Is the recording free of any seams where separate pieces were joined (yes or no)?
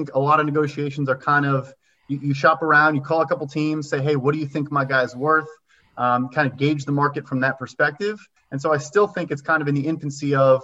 no